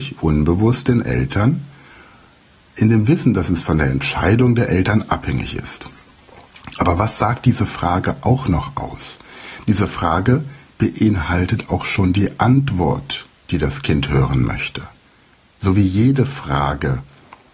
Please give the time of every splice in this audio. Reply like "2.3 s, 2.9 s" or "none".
none